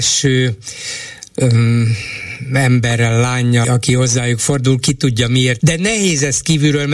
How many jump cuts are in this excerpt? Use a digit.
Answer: 2